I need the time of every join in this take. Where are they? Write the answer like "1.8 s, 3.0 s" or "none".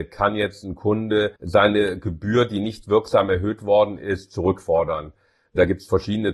1.4 s